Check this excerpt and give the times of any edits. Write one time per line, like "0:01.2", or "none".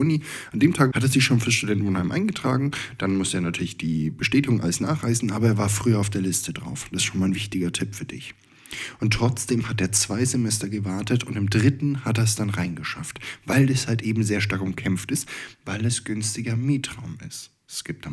0:00.9